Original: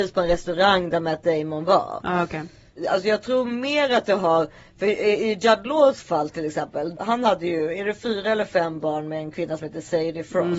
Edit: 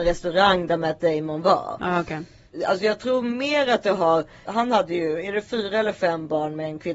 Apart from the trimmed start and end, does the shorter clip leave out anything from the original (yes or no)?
yes